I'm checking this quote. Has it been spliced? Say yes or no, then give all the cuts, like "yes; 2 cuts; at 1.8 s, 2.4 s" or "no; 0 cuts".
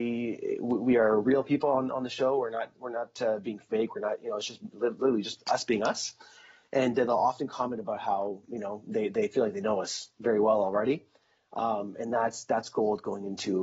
no; 0 cuts